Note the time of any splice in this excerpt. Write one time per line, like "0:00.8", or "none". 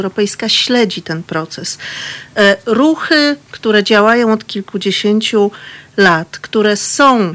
none